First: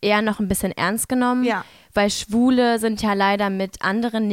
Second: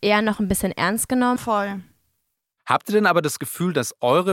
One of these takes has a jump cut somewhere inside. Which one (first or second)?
second